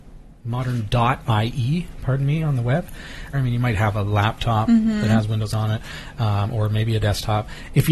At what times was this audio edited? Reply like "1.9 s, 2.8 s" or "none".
3.3 s